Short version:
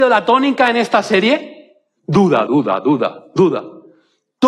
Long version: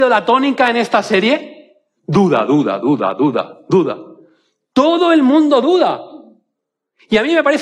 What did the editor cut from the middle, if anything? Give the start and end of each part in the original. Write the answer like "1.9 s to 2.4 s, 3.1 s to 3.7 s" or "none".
2.5 s to 2.8 s

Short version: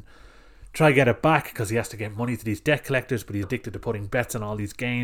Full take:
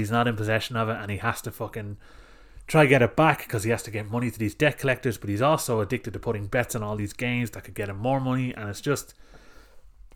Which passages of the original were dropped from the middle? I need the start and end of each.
5.4 s to 5.8 s

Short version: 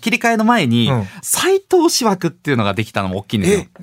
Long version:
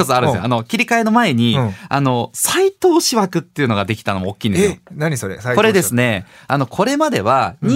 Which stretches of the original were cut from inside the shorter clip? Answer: 1.9 s to 2.3 s

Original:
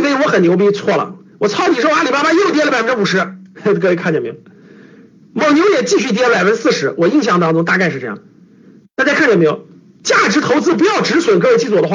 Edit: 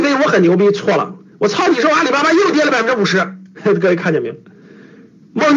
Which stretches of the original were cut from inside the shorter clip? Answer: none

